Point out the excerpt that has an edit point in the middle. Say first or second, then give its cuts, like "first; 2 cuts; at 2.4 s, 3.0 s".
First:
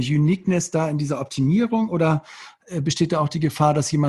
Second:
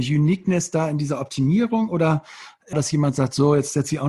second; 1 cut; at 2.7 s